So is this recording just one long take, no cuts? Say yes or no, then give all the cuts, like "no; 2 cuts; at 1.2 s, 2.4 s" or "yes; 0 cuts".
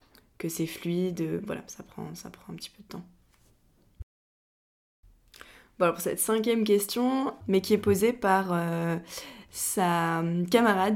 no; 1 cut; at 7.4 s